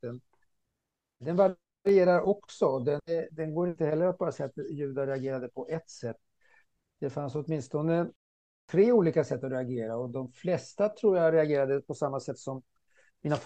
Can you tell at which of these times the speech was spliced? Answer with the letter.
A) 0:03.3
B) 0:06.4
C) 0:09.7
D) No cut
A